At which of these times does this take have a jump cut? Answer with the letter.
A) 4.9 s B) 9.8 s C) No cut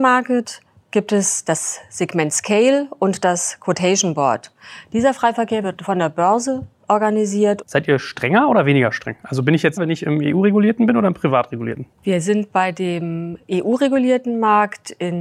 B